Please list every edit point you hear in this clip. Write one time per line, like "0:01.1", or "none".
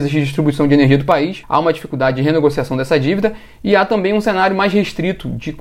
0:01.4